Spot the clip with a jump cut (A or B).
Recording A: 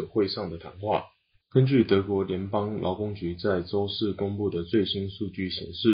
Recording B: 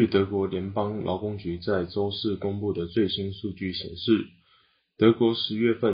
A